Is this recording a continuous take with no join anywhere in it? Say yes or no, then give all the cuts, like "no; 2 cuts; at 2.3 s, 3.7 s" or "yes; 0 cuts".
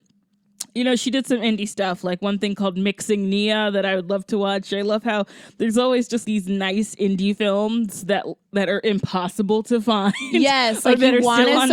no; 1 cut; at 6.2 s